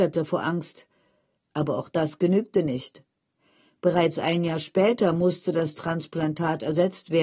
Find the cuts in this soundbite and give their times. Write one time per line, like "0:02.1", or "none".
0:01.4